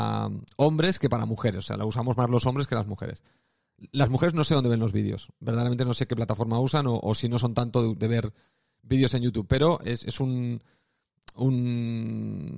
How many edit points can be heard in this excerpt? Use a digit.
0